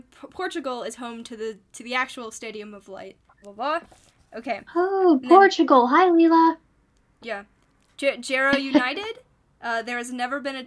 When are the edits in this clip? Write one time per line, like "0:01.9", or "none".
0:03.4